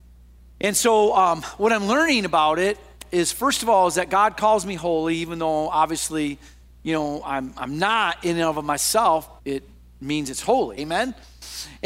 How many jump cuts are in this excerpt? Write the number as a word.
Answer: two